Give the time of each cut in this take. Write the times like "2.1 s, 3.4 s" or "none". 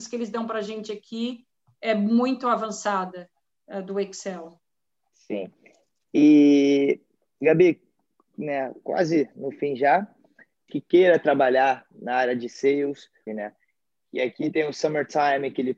10.7 s, 13.3 s